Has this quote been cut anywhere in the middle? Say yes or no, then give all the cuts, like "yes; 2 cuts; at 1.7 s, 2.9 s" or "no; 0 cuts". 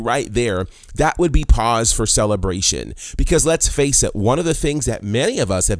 no; 0 cuts